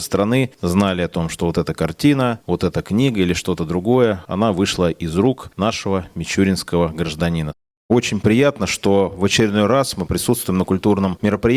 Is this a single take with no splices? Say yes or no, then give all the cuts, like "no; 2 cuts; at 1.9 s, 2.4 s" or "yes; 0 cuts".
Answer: no; 1 cut; at 7.8 s